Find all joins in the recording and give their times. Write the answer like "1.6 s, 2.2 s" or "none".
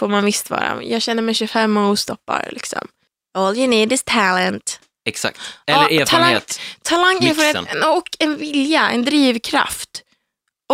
none